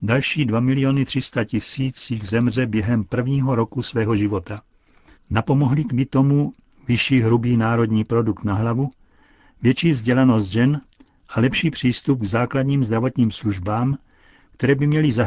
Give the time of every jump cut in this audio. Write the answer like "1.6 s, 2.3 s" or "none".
5.1 s